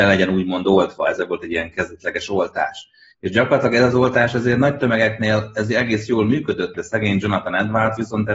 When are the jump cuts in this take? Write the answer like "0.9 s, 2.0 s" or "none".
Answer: 3.1 s, 6.7 s